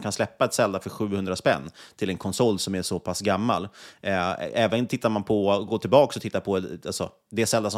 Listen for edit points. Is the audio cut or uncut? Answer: uncut